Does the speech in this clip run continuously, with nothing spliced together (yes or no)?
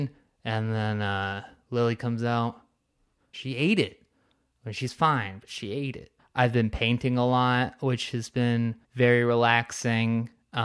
no